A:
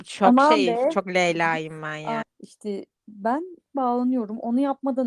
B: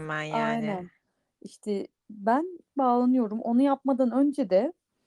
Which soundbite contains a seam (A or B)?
A